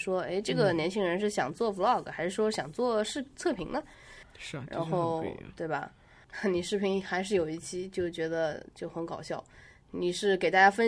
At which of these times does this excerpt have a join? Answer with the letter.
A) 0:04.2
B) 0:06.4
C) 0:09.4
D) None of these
A